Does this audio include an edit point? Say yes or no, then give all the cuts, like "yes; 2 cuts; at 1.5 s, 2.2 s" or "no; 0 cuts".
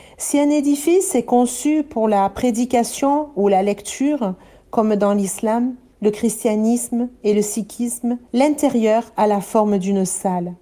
yes; 2 cuts; at 5.9 s, 8.3 s